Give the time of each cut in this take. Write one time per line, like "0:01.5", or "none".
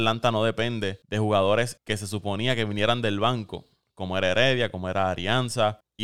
none

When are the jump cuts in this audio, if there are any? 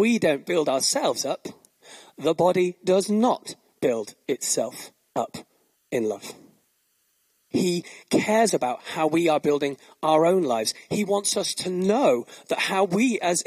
0:07.5

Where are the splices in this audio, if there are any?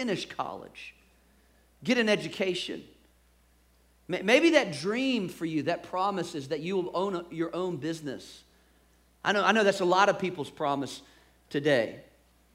none

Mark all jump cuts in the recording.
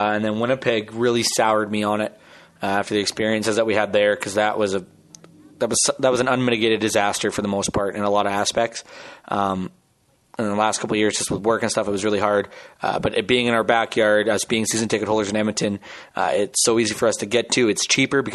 none

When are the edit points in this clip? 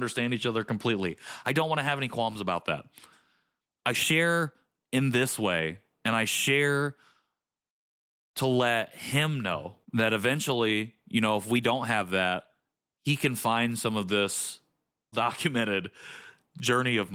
0:09.8
0:15.1

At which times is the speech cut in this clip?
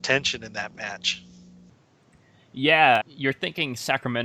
0:03.0

